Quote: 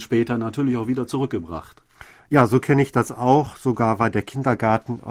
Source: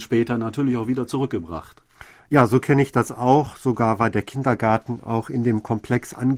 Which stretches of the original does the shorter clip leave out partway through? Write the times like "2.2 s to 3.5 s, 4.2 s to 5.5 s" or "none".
none